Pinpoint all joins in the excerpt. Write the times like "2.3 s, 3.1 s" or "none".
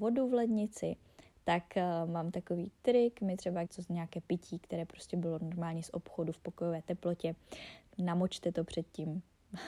3.7 s, 7.9 s